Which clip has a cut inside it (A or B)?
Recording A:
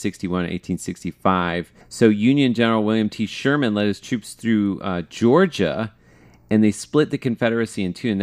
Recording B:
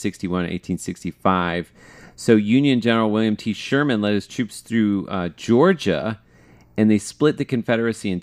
A